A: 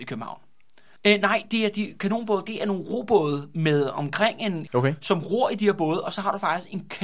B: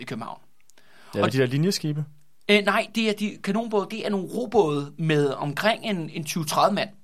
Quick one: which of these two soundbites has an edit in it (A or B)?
A